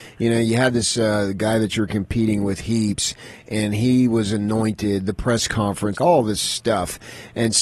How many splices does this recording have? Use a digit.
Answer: 1